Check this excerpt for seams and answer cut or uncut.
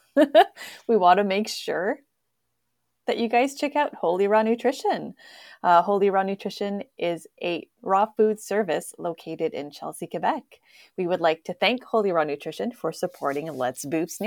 uncut